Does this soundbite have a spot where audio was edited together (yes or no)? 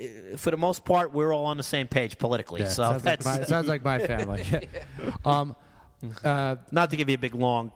no